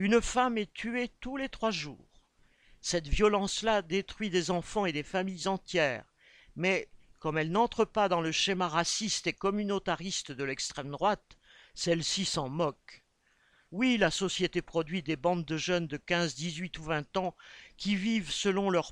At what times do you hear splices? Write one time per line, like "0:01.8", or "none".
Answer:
0:13.6